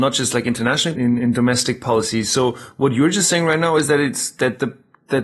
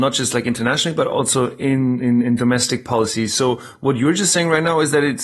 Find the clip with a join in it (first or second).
first